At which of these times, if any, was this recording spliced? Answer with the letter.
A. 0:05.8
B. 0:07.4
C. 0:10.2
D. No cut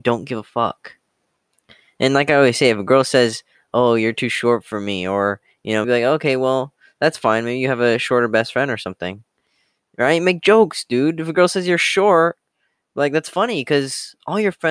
A